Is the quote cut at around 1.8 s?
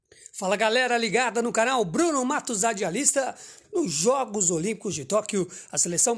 no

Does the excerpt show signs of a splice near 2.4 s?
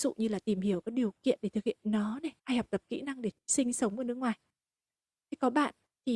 yes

